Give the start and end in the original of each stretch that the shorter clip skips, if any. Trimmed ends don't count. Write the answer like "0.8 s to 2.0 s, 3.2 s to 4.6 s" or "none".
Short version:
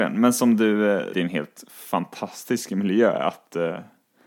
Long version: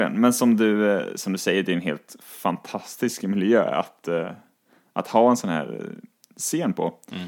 1.1 s to 1.6 s

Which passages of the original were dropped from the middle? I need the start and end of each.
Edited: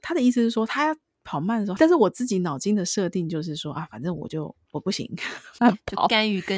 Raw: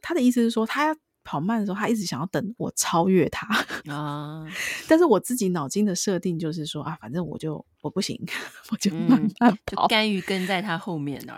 1.8 s to 4.9 s, 8.7 s to 9.4 s

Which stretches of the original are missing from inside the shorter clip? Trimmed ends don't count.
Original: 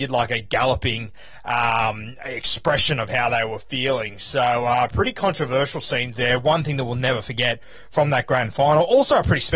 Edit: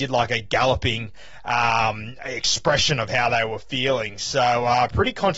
none

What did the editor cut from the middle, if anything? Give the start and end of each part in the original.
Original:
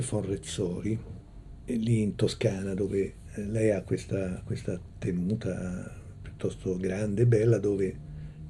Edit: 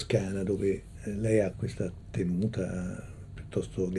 3.8 s to 4.4 s

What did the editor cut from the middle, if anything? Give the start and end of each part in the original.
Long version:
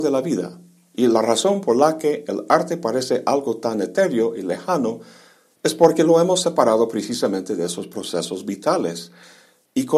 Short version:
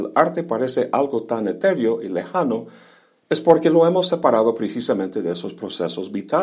none

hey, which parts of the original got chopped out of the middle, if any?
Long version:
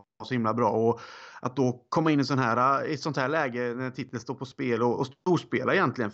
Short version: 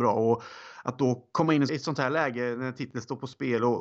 2.3 s to 2.9 s

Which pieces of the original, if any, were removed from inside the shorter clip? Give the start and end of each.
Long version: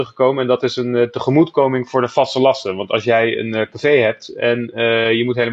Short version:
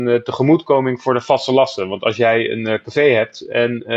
none

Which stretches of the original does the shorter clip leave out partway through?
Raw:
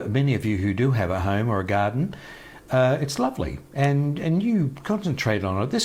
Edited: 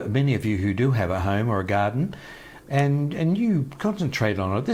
2.6 s to 3.7 s

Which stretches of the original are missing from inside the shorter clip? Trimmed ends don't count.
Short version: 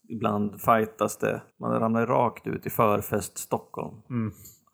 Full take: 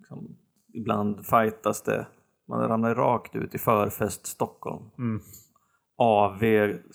2.1 s to 2.4 s

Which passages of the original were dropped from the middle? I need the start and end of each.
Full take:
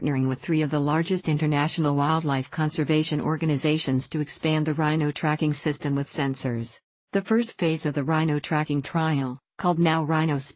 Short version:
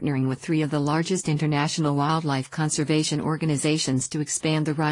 none

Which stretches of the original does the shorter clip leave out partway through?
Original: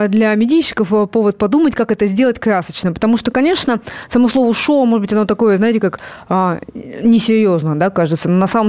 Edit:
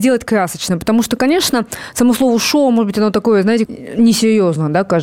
5.8 s to 6.7 s

